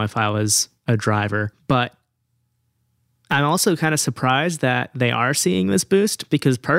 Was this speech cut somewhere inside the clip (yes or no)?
yes